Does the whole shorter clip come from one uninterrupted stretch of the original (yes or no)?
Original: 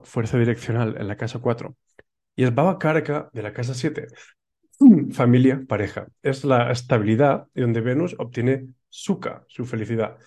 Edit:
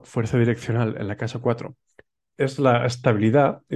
no